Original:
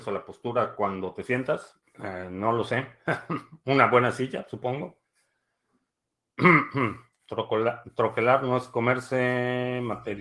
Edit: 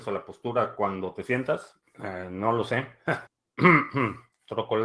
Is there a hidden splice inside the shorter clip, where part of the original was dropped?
yes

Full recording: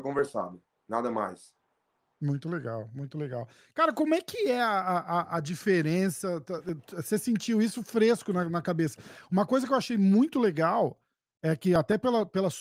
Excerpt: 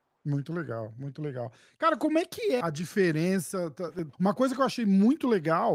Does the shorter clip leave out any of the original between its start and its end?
yes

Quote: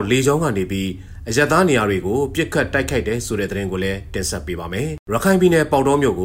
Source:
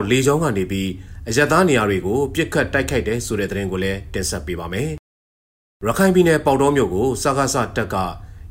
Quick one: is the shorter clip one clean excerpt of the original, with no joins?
no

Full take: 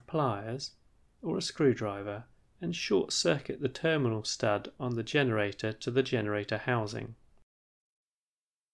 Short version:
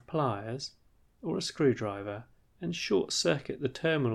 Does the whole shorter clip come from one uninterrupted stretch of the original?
yes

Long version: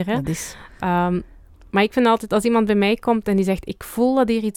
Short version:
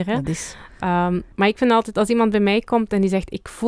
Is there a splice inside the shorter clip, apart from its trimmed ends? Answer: yes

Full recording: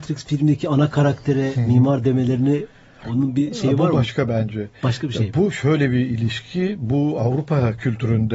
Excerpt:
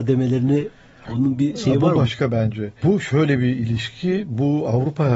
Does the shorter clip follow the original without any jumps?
no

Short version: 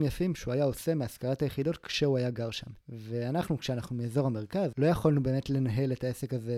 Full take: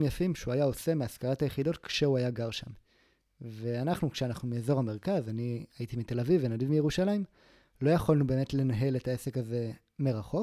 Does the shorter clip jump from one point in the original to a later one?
yes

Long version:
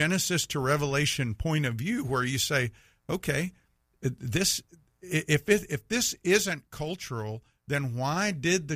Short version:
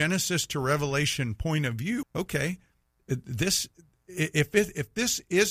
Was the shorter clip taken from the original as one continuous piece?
no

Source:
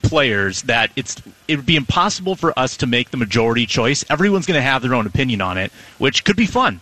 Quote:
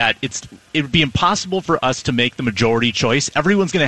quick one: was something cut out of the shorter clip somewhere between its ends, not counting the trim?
no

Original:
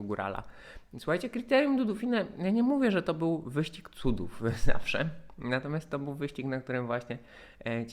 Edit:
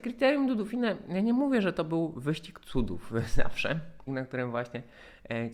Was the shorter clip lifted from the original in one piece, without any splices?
no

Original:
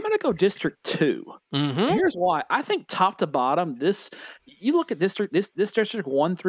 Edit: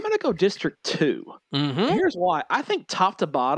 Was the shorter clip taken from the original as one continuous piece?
yes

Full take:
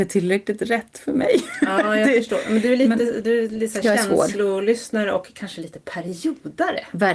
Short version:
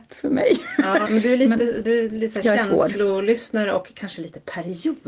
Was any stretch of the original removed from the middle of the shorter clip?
yes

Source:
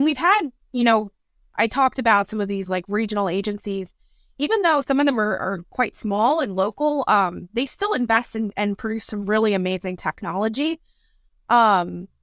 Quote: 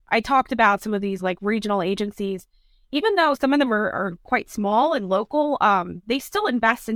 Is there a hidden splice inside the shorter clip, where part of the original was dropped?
no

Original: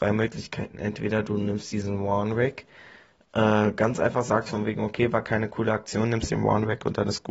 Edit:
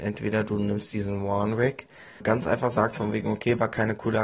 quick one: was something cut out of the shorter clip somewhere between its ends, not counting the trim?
yes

